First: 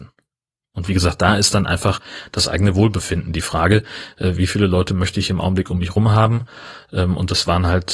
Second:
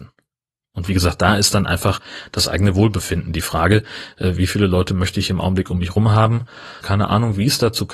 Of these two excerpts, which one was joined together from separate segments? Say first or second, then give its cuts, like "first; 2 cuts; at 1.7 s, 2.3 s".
second; 1 cut; at 6.8 s